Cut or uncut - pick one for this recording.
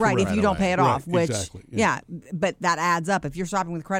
uncut